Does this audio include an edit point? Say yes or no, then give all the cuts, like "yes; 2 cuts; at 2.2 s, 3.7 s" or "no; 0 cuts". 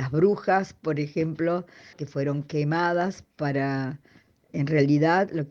yes; 2 cuts; at 1.9 s, 4.5 s